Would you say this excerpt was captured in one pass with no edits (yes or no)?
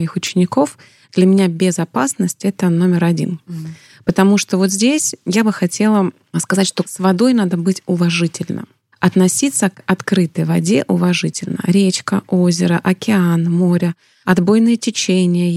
yes